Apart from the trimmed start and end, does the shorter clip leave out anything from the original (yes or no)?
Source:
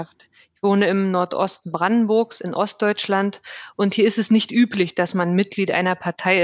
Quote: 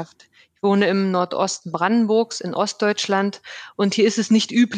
no